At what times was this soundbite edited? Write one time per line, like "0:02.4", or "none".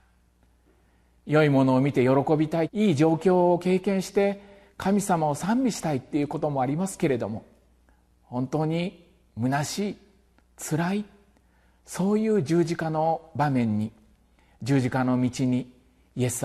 0:02.7